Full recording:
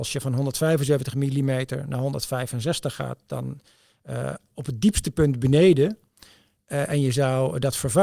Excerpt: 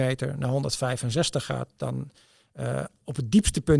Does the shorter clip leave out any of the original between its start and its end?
no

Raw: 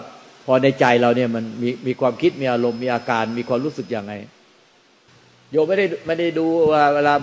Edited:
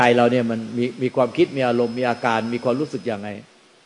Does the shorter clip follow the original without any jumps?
yes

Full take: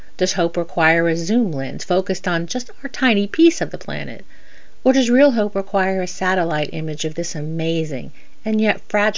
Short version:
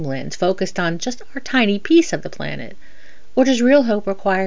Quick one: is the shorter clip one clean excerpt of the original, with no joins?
yes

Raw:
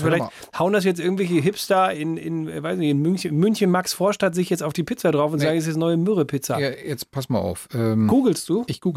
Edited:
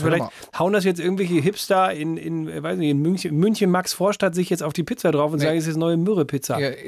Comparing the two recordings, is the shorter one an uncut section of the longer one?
yes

